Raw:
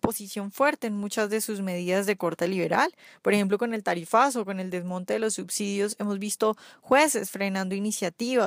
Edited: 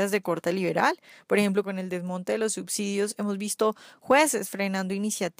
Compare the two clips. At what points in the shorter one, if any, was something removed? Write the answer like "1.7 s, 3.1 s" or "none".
1.6 s